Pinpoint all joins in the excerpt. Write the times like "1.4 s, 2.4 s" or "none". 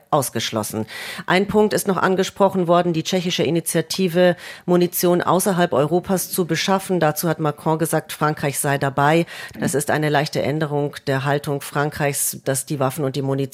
9.5 s, 12.4 s

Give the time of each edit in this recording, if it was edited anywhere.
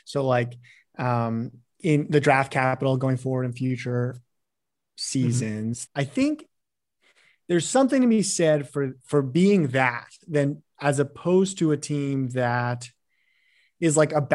5.9 s

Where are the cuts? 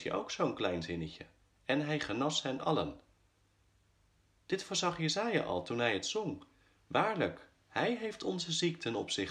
none

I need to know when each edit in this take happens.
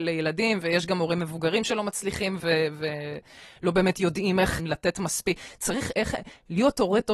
2.4 s, 4.6 s

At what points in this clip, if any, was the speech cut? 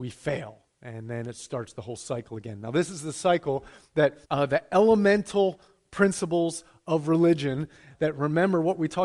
4.2 s, 7.9 s

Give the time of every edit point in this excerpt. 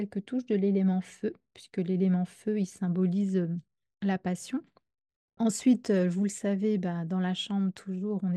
5.4 s

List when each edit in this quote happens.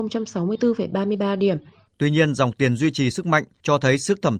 1.9 s

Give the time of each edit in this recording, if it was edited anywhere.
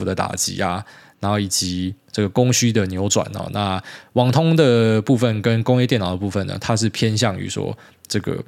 none

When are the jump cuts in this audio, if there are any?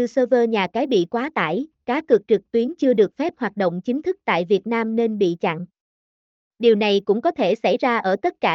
1.7 s

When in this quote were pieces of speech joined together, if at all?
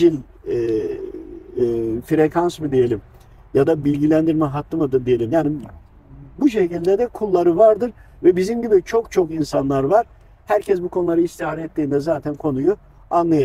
none

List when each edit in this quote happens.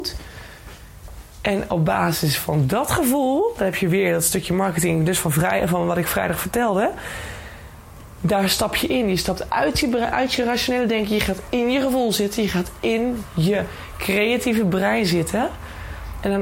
none

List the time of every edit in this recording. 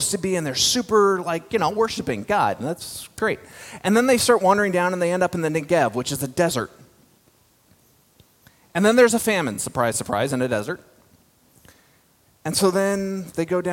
none

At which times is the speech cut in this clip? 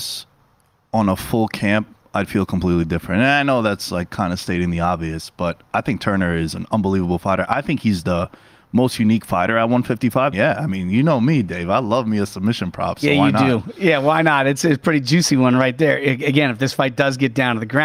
10.3 s

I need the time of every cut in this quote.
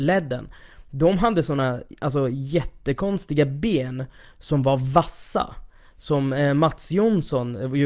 none

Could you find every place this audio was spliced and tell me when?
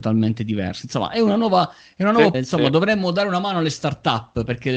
2.3 s

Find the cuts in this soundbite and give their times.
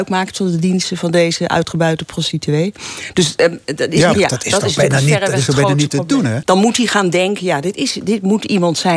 4.1 s, 6.4 s

